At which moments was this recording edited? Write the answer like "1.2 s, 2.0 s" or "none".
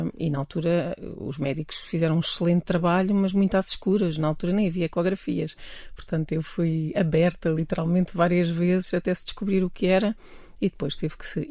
none